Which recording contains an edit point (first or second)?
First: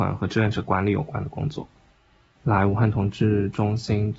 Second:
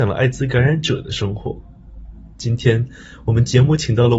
first